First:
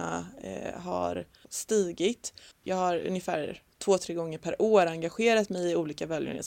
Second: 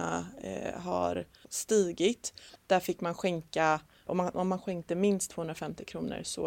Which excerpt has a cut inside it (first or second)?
second